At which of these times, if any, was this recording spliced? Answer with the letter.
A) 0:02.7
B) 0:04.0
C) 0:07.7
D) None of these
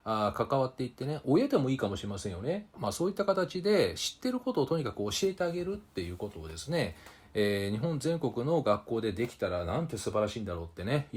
A